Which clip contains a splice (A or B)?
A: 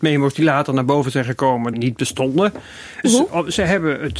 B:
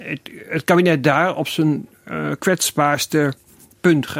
A